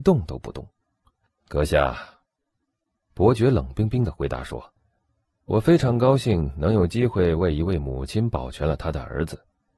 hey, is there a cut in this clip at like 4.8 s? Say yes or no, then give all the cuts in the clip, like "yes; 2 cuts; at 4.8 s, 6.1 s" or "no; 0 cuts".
yes; 2 cuts; at 1.3 s, 4.8 s